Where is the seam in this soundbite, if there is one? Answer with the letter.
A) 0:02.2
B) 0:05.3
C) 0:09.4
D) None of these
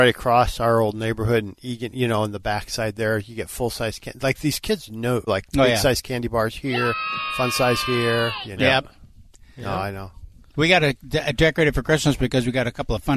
B